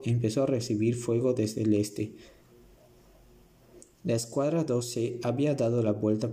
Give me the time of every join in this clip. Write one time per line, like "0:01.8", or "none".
none

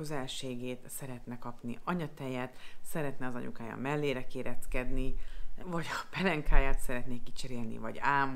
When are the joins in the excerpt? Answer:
0:05.6

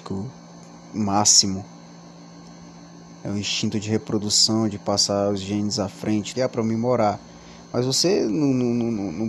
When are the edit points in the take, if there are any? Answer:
0:06.3

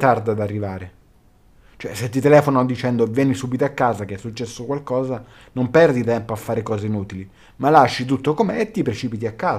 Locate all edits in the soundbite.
none

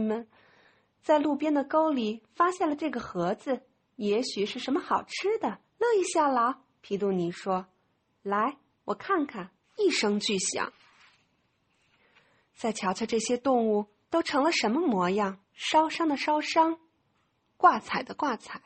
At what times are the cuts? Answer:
0:05.6
0:09.6
0:15.4

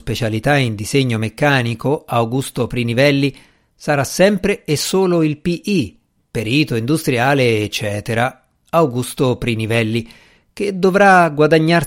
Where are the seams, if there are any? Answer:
none

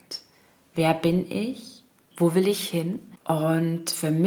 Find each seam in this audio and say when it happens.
0:02.1
0:03.2

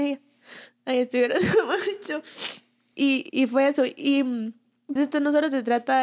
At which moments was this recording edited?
0:03.3
0:05.0

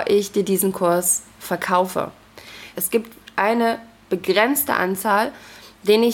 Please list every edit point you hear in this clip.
0:02.7

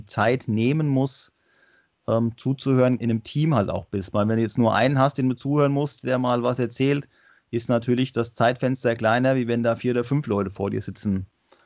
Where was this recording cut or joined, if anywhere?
0:03.0

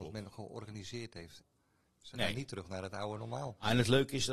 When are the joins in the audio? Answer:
0:01.4

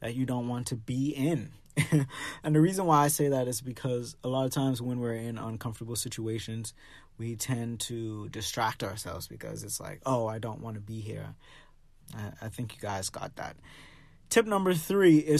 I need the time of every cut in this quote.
0:12.0

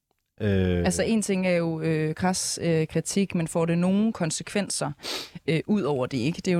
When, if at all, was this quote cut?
none

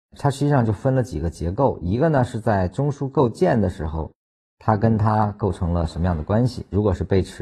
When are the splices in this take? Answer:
none

